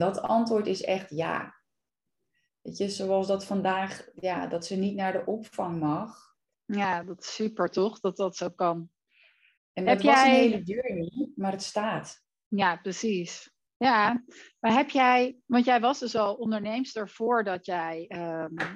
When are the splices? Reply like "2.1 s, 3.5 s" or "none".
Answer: 6.5 s, 9.6 s